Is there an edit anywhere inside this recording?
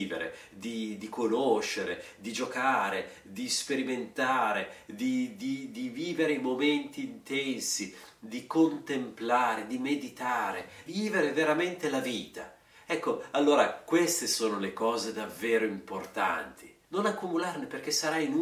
yes; 2 cuts; at 10.9 s, 16.8 s

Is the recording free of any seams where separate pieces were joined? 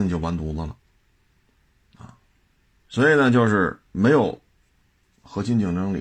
yes; 0 cuts

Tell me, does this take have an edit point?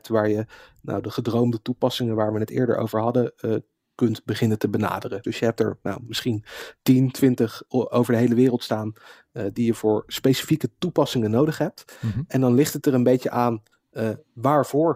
yes; 1 cut; at 5.2 s

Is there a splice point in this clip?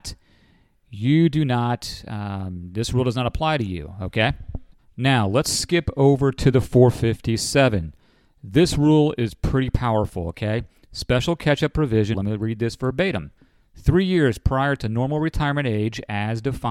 yes; 1 cut; at 12.1 s

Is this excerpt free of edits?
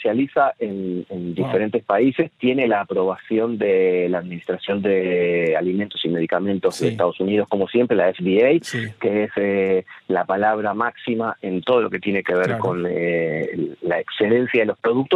yes; 0 cuts

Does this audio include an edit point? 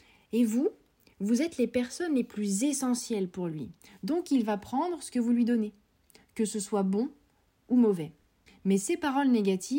no; 0 cuts

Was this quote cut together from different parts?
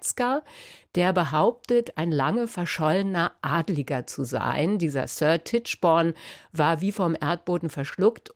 no; 0 cuts

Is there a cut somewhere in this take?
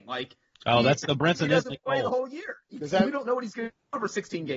yes; 1 cut; at 1.0 s

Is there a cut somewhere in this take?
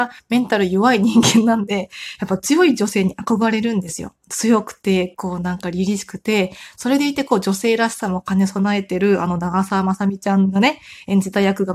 no; 0 cuts

